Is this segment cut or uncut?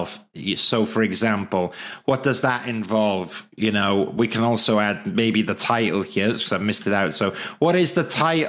uncut